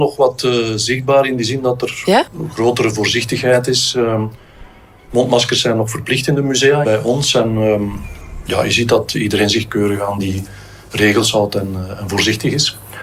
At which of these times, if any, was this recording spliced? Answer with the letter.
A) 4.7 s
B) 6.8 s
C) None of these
B